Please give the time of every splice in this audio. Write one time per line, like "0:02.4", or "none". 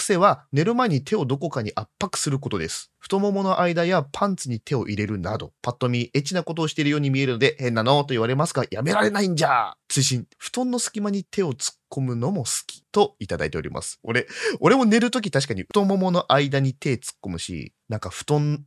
0:14.0